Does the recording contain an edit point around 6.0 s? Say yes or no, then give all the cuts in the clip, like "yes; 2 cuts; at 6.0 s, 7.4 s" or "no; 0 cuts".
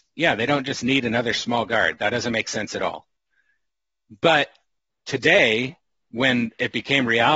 no; 0 cuts